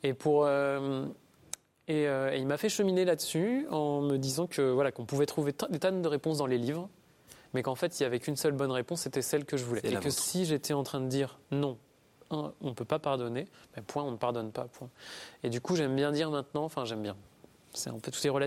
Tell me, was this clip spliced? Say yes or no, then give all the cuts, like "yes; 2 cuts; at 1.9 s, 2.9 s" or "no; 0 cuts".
no; 0 cuts